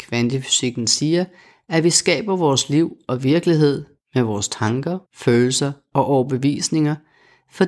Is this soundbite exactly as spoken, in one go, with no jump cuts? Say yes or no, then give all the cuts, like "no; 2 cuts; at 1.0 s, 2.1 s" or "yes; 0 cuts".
no; 1 cut; at 5.1 s